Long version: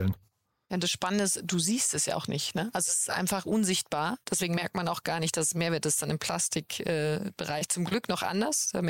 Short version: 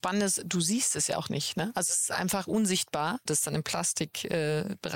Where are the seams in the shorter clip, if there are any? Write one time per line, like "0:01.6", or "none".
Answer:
0:03.3